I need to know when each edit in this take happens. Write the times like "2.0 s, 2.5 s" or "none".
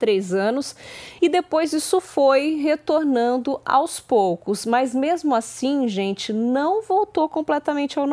1.2 s